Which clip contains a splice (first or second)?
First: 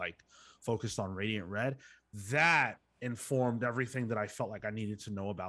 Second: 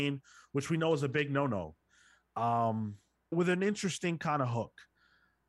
second